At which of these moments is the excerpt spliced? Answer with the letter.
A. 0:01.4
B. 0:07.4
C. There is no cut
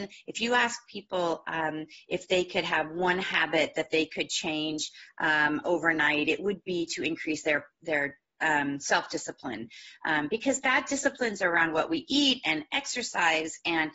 B